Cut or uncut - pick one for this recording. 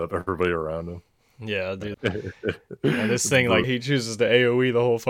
cut